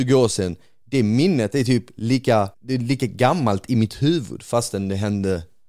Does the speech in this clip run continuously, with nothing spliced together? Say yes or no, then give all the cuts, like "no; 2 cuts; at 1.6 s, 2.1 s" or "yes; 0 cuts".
no; 1 cut; at 2.5 s